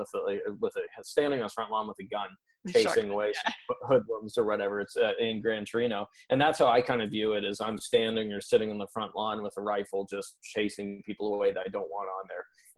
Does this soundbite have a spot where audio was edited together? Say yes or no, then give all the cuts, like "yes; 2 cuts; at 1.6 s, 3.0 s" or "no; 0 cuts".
no; 0 cuts